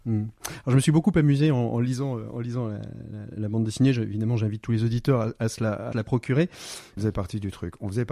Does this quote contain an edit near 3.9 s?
no; 2 cuts; at 5.9 s, 7.0 s

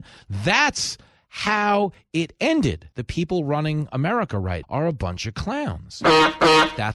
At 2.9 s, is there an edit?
yes; 2 cuts; at 2.9 s, 4.6 s

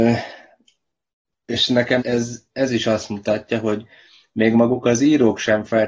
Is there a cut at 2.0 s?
yes; 1 cut; at 2.0 s

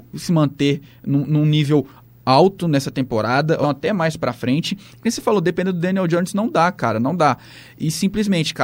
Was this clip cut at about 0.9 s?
no; 1 cut; at 3.6 s

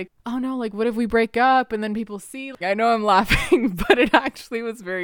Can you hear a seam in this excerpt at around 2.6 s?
yes; 1 cut; at 2.6 s

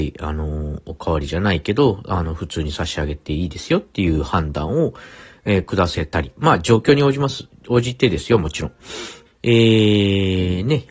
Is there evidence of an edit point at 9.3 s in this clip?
yes; 1 cut; at 9.3 s

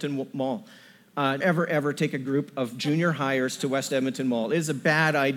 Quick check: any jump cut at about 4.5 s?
no; 1 cut; at 1.4 s

